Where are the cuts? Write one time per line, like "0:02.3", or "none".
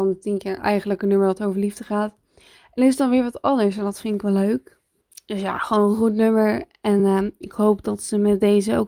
none